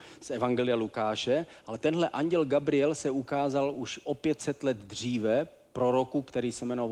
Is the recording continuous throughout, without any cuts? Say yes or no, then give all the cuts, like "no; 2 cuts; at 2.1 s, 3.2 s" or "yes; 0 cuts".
yes; 0 cuts